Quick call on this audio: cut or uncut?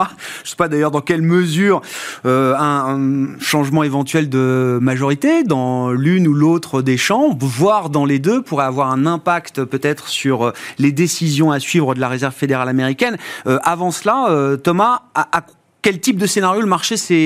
uncut